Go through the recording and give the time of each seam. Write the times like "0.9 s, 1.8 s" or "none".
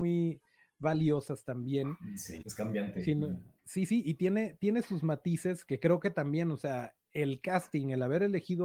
2.4 s, 3.6 s